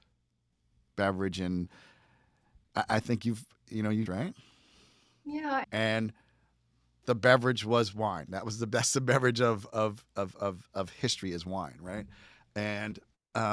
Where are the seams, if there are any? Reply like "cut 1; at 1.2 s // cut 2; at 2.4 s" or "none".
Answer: cut 1; at 4.1 s // cut 2; at 5.6 s